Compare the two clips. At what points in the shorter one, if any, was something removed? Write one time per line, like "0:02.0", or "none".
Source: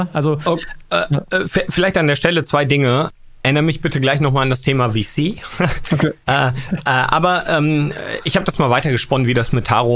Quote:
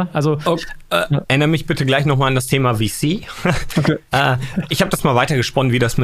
0:01.3
0:04.7

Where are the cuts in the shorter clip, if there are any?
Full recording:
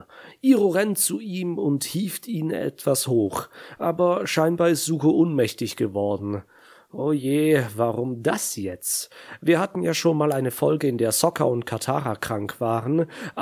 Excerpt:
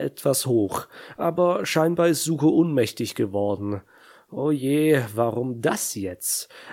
none

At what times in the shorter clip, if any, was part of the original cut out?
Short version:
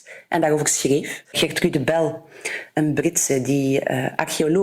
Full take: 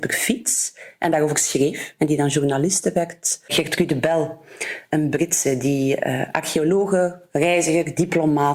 0:01.2

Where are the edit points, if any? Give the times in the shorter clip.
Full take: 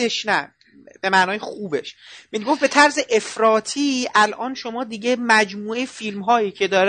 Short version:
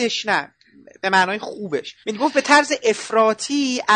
0:02.0

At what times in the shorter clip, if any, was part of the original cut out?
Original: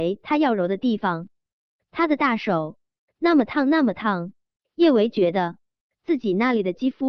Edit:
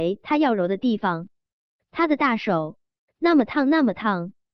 none

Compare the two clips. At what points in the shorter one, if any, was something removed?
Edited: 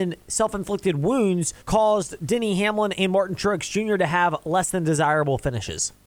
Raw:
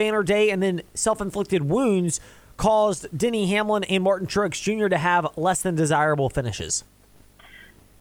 0:01.6

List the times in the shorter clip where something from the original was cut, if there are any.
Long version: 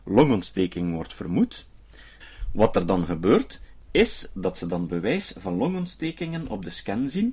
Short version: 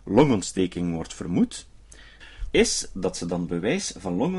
0:02.5

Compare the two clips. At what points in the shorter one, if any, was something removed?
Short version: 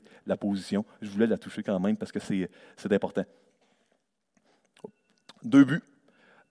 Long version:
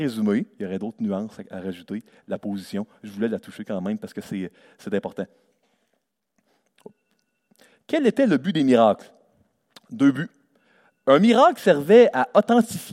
0:05.3

